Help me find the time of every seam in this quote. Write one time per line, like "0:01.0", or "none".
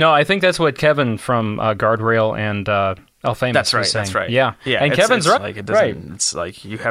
0:05.4